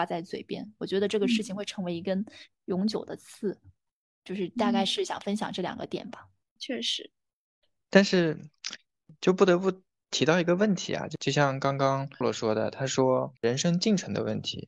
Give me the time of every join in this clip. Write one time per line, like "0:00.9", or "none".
0:12.2
0:13.4

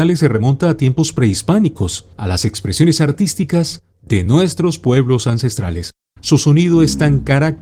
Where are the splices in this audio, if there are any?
0:02.1
0:06.2

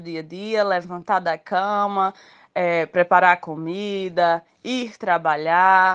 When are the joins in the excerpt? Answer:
none

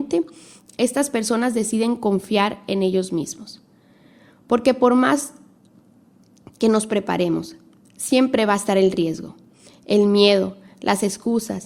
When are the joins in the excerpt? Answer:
none

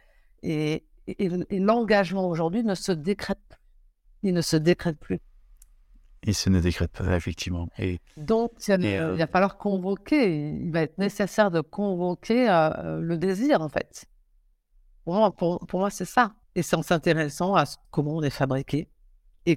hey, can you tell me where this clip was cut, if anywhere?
0:16.4
0:17.8

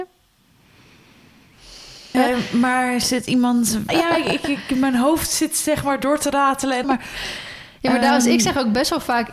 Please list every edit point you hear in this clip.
0:02.1
0:03.9
0:06.8

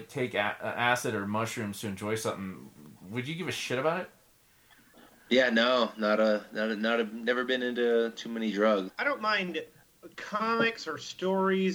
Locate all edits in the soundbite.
0:08.9

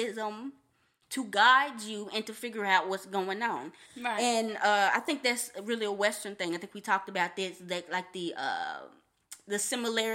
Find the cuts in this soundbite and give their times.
none

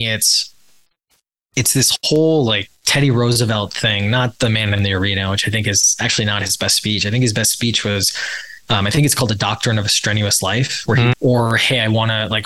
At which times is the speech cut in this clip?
0:02.7
0:11.1

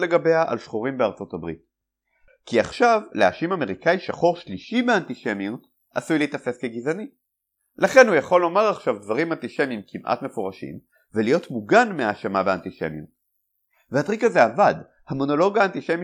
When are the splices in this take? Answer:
0:02.3

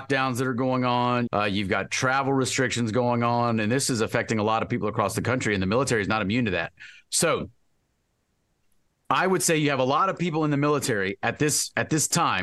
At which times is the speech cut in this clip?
0:01.3

